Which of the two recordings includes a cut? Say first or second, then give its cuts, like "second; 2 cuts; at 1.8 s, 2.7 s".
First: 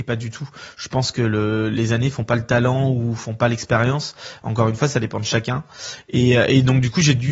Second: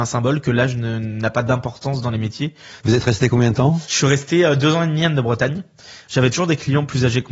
second; 2 cuts; at 2.8 s, 6.1 s